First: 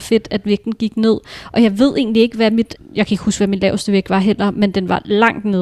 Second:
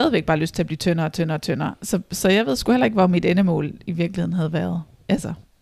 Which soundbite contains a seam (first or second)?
first